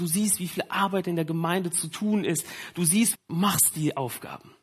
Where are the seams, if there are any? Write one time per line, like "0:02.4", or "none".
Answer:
0:03.1